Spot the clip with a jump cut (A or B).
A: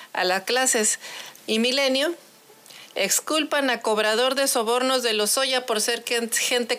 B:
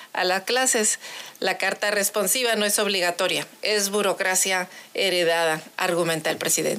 A